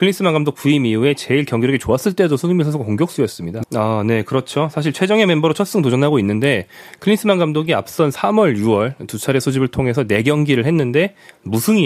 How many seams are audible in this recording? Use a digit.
1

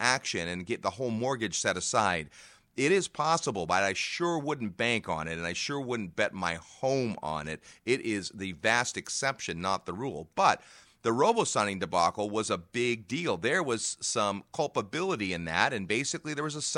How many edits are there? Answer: 0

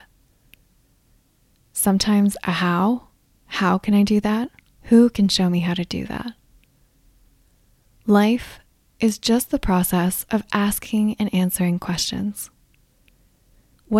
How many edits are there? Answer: 1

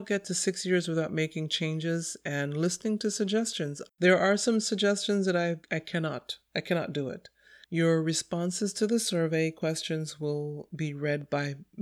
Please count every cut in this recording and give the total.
2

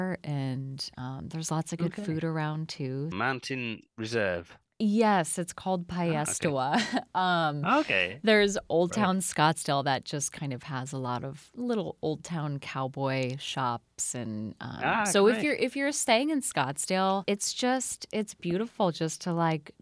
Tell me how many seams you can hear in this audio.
1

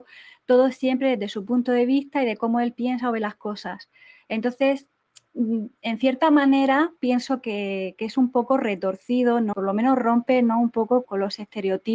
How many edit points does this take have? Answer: 2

